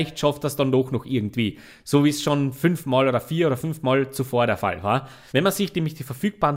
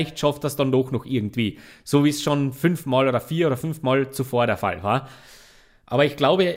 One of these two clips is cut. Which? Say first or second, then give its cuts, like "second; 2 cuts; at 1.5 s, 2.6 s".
first; 1 cut; at 5.3 s